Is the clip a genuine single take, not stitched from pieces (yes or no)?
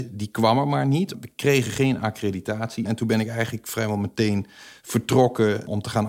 no